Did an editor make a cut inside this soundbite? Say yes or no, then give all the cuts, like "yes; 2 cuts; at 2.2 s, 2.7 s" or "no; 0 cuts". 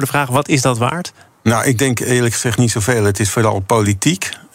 no; 0 cuts